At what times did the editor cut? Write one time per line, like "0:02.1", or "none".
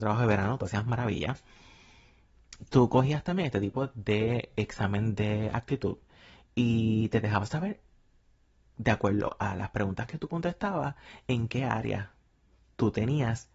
none